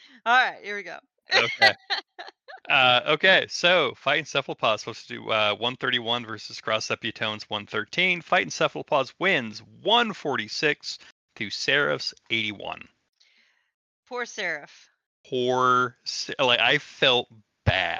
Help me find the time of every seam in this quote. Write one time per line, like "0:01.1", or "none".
0:02.6